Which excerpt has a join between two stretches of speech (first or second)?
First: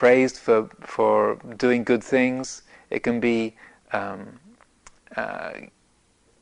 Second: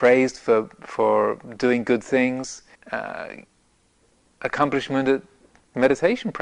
second